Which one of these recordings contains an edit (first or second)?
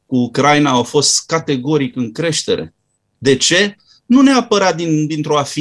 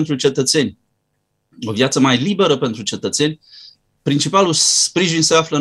first